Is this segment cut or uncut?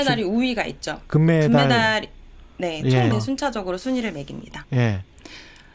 cut